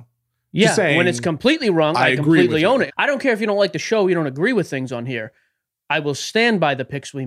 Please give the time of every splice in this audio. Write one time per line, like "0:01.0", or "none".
0:02.9